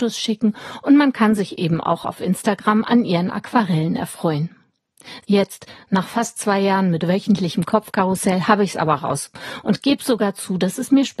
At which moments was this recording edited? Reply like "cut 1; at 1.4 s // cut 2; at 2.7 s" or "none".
cut 1; at 5.2 s